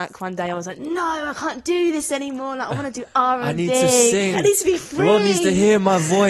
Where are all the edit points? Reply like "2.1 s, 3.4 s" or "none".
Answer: 4.3 s